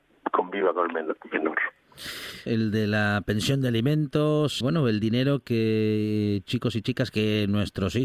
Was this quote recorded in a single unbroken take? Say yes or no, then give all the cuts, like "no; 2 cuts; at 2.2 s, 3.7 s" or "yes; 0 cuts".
no; 2 cuts; at 2.5 s, 4.6 s